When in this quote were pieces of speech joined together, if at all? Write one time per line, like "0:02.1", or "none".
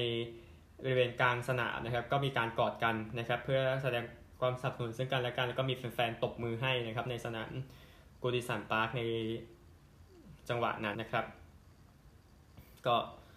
0:10.9